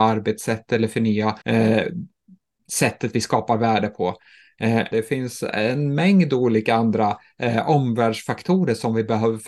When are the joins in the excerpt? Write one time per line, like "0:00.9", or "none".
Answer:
0:01.4
0:04.9